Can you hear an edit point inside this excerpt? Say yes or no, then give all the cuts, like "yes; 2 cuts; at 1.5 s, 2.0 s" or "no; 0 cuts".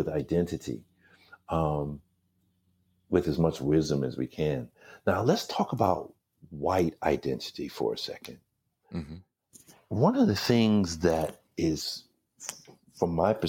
no; 0 cuts